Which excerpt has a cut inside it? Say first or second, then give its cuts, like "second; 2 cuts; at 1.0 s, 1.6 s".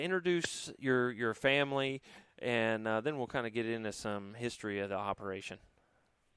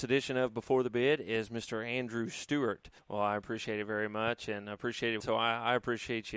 second; 2 cuts; at 3.0 s, 5.2 s